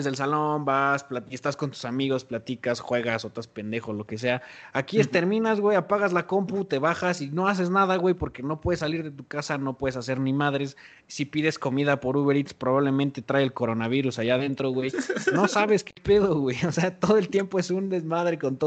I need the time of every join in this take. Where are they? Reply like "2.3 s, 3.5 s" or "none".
none